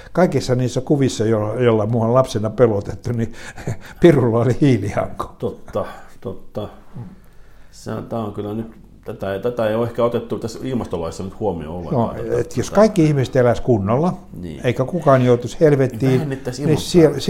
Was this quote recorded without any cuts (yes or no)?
yes